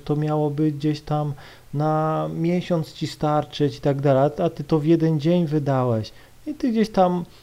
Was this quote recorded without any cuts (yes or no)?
yes